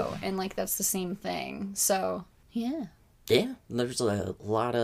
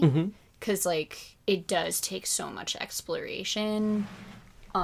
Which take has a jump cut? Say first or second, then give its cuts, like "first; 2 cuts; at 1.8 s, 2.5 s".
second; 1 cut; at 1.4 s